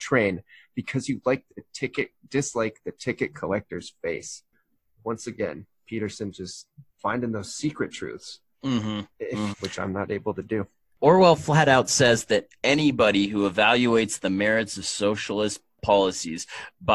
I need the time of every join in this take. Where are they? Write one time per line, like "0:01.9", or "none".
0:09.5